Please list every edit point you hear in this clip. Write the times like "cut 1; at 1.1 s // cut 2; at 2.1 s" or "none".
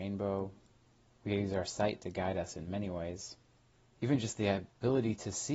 cut 1; at 1.1 s